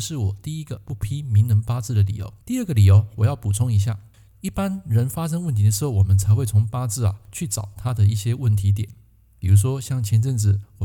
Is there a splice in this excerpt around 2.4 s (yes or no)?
yes